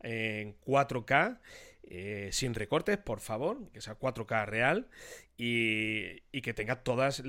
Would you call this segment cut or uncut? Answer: cut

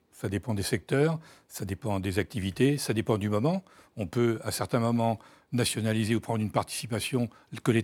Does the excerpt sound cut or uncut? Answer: uncut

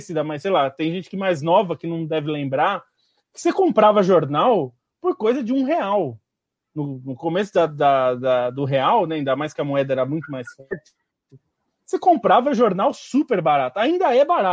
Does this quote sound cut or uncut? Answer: uncut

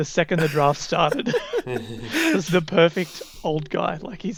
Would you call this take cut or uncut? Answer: cut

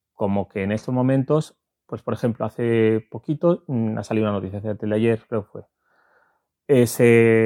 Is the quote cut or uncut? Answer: uncut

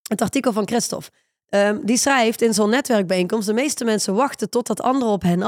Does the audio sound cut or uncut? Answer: uncut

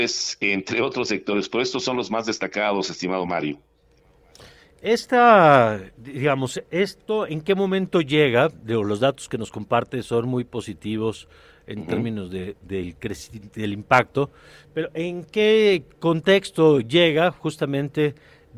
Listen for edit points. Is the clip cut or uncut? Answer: uncut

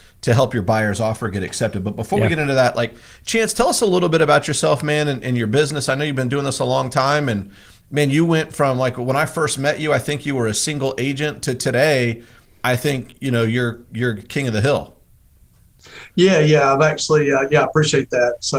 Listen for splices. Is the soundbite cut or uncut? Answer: uncut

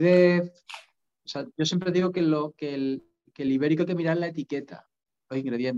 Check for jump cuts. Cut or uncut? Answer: uncut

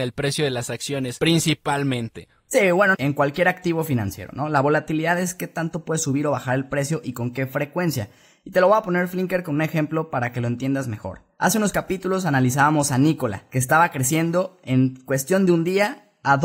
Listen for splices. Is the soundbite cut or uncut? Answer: cut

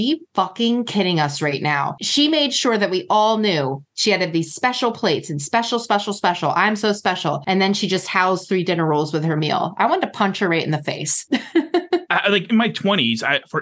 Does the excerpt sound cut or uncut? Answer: uncut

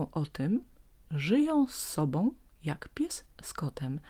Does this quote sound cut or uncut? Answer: uncut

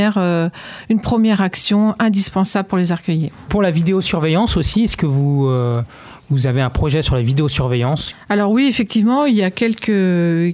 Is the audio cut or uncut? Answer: cut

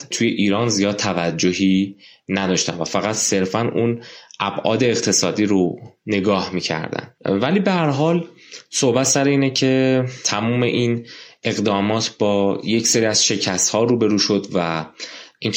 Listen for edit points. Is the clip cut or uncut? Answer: cut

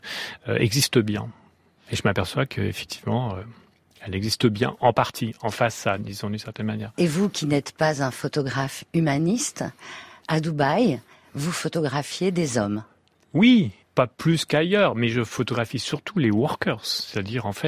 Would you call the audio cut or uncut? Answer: uncut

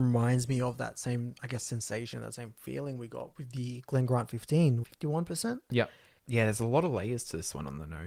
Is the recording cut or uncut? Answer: cut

